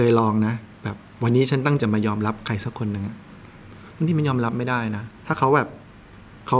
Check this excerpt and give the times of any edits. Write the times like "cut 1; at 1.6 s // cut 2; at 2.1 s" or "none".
cut 1; at 1.8 s